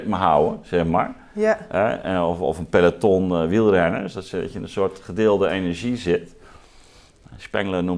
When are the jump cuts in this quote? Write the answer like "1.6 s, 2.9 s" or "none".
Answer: none